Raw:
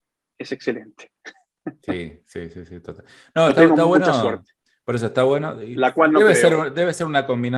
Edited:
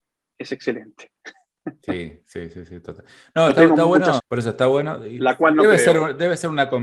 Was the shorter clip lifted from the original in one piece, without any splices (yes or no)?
no